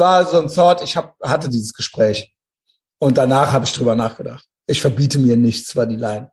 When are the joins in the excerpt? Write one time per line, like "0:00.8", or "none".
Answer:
none